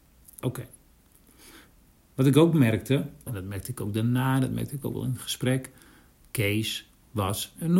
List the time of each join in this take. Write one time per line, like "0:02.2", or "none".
0:03.3